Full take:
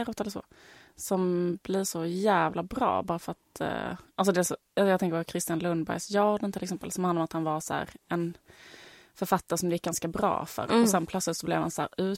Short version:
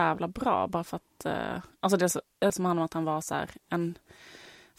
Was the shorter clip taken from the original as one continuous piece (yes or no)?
no